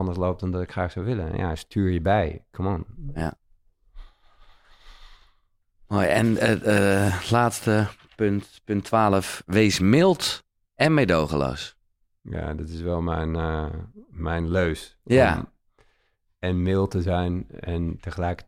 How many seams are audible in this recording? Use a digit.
0